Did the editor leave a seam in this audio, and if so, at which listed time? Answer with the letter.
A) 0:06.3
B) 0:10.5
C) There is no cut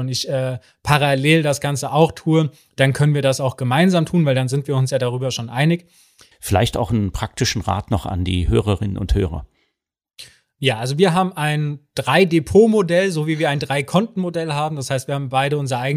A